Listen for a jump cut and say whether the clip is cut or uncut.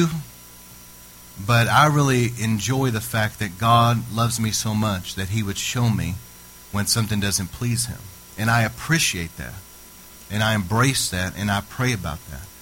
uncut